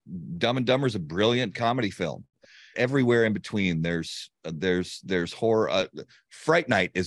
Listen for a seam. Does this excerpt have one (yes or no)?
yes